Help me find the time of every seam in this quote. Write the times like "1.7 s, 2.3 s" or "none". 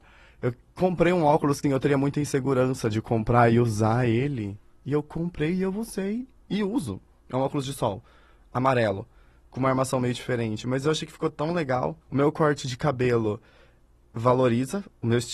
1.6 s, 12.0 s